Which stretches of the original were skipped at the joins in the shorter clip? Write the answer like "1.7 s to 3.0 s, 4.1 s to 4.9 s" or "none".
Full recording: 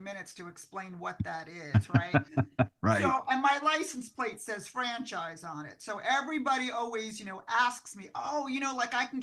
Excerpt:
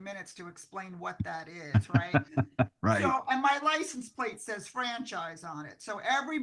none